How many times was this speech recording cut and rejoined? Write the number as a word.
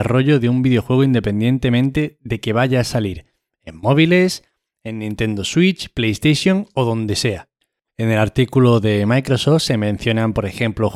one